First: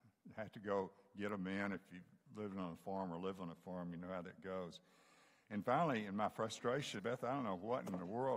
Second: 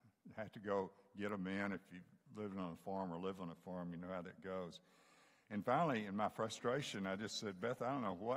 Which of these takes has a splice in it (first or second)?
first